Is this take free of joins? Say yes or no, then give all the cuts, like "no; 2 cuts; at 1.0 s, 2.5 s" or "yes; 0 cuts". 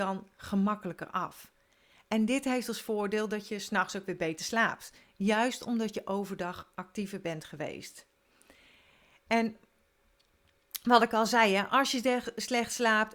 yes; 0 cuts